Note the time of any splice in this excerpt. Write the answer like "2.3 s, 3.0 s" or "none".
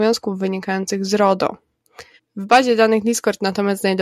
2.2 s